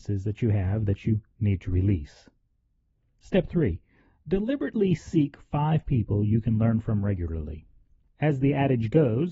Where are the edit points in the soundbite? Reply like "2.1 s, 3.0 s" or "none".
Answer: none

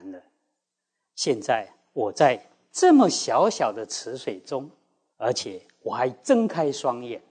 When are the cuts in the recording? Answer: 5.1 s

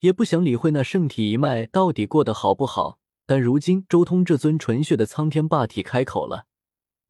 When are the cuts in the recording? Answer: none

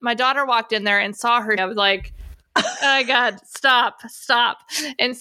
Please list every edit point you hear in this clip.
1.6 s

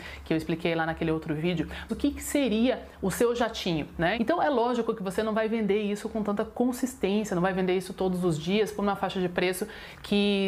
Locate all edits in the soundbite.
1.9 s, 4.1 s

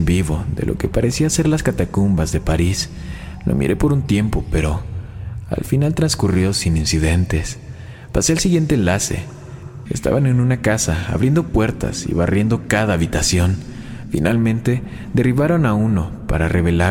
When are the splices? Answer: 9.9 s

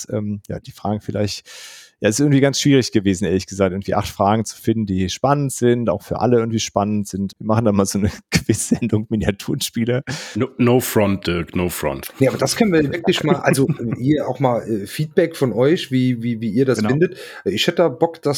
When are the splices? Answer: 7.3 s

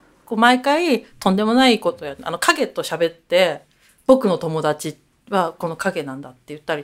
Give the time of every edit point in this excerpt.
none

